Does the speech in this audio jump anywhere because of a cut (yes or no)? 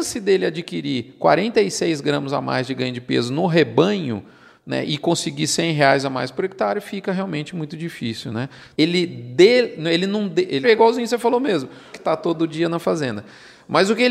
yes